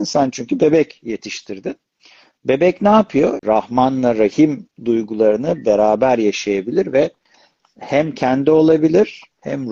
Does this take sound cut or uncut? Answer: cut